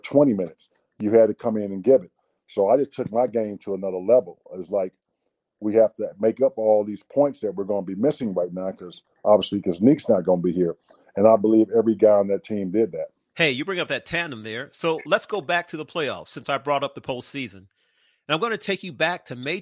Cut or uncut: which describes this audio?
uncut